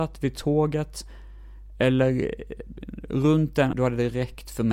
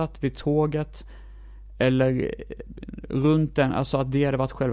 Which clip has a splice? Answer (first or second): first